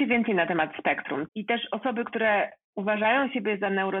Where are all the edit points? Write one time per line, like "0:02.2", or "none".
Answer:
0:01.3